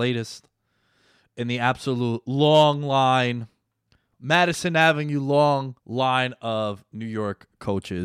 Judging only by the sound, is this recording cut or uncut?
cut